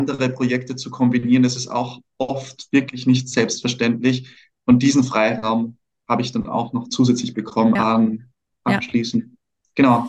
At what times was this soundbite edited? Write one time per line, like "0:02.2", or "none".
0:07.8